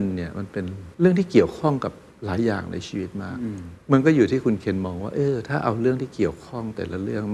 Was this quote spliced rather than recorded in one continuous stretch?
yes; 2 cuts; at 0.9 s, 3.8 s

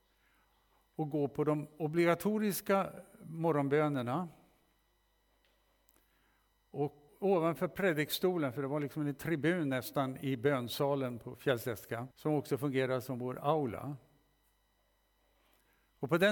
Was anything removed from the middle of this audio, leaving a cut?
yes; 2 cuts; at 7.1 s, 12.1 s

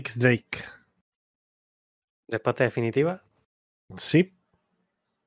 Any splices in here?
no; 0 cuts

